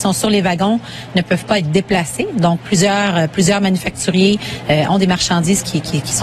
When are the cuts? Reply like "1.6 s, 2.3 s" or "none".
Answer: none